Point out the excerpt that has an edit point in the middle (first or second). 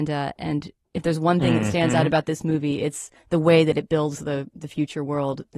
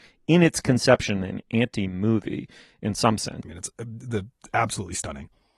second